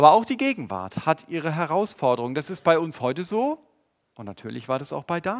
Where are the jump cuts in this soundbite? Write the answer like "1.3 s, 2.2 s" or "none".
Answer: none